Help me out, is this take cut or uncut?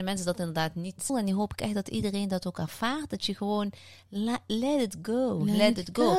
cut